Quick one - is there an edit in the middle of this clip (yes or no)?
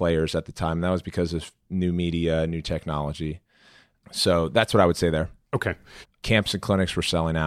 yes